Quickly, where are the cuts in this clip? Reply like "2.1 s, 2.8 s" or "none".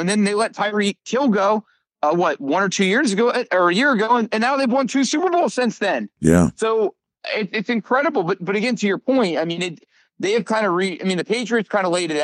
none